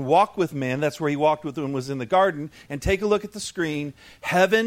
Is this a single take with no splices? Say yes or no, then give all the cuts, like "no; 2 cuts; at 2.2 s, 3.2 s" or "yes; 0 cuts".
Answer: yes; 0 cuts